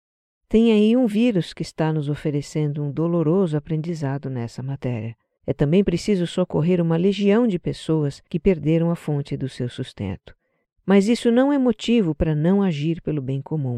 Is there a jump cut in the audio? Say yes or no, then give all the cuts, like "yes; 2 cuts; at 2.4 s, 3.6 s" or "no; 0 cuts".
yes; 3 cuts; at 5.4 s, 8.3 s, 10.6 s